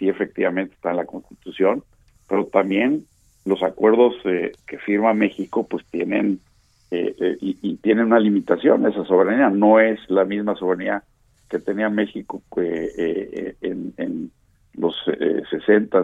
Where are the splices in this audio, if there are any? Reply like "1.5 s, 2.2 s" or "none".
4.6 s